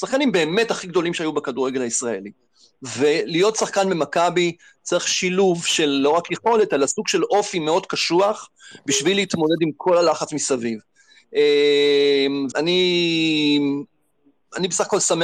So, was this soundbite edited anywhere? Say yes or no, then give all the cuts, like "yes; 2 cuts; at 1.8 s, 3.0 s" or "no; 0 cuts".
yes; 1 cut; at 12.5 s